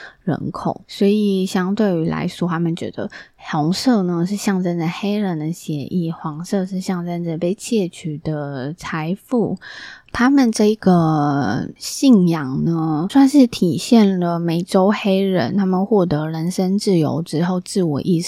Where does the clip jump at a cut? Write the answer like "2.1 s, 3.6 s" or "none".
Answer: 10.1 s, 13.1 s